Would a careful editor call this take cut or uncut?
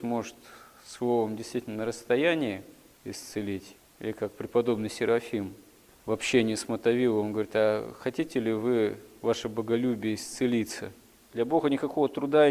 cut